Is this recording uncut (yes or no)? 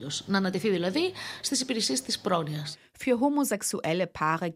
yes